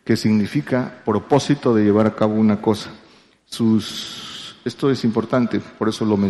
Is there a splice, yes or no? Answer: no